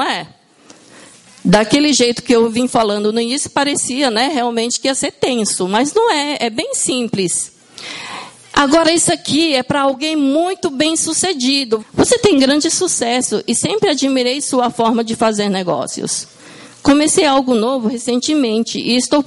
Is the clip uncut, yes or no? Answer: no